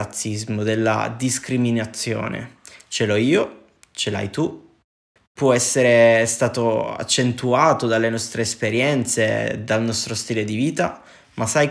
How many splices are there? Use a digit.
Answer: 1